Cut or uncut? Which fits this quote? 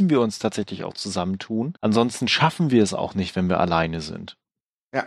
cut